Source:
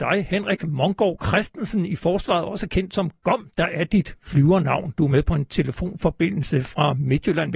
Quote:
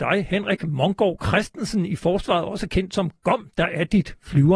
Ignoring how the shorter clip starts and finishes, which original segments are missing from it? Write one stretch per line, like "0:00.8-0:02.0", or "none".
none